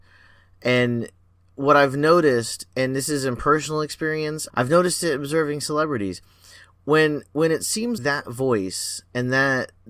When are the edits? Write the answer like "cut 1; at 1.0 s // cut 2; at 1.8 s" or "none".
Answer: cut 1; at 4.5 s // cut 2; at 8.0 s